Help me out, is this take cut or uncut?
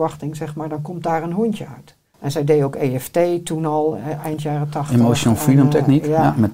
cut